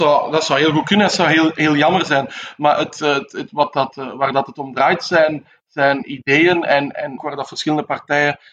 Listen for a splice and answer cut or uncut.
cut